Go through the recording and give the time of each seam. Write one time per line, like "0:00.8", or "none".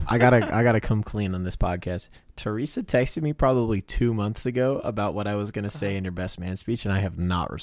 none